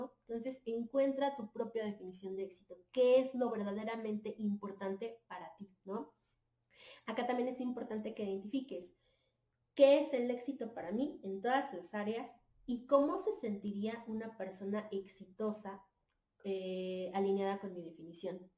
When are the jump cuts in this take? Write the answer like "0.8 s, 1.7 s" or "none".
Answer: none